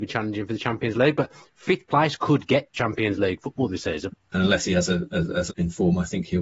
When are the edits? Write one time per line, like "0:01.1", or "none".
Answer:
0:04.1
0:05.5